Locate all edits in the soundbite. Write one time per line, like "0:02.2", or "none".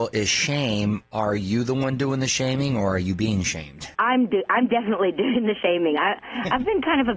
0:03.9